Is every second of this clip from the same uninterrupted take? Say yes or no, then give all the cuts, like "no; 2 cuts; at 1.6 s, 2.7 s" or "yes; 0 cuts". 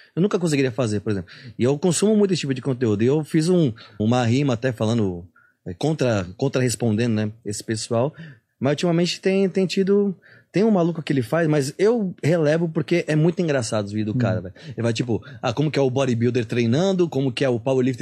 no; 1 cut; at 4.0 s